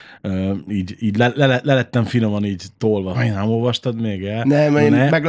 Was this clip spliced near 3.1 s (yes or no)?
yes